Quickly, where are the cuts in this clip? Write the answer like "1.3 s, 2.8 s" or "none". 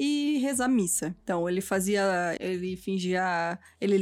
1.2 s, 2.4 s